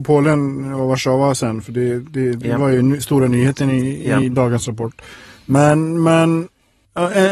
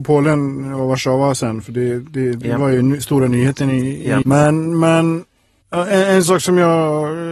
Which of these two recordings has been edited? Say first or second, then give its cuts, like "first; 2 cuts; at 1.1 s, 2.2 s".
second; 1 cut; at 4.2 s